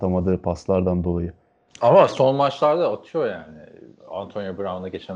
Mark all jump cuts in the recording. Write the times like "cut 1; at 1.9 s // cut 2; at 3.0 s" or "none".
none